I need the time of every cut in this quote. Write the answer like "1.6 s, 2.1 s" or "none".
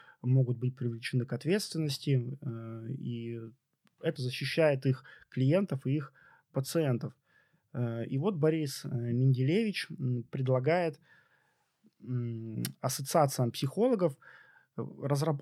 4.2 s